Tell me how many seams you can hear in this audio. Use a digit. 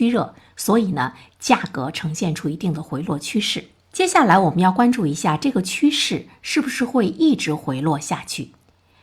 0